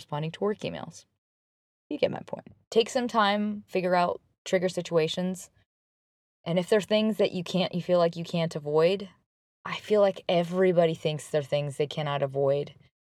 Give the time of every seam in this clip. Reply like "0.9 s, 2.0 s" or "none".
3.7 s